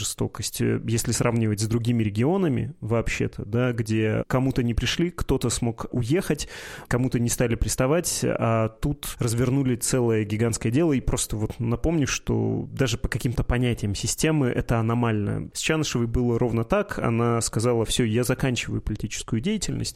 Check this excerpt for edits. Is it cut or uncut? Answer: cut